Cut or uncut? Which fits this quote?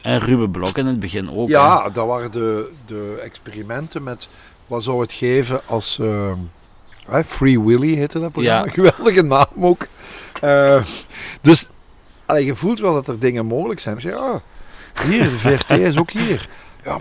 cut